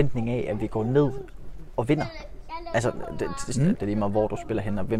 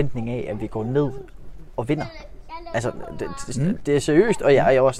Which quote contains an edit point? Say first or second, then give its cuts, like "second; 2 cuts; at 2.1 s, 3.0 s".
first; 1 cut; at 3.7 s